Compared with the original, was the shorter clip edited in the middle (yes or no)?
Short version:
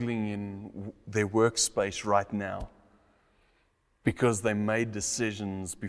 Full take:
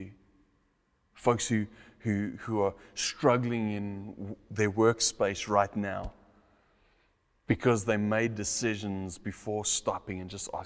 no